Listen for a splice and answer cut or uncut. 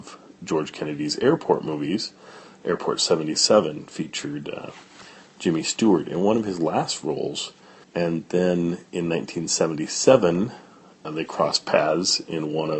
cut